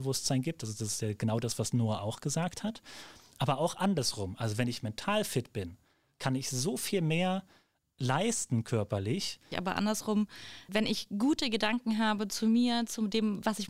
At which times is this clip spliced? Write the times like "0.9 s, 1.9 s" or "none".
9.5 s, 10.7 s